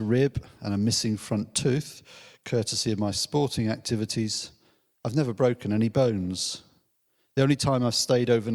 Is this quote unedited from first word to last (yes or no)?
yes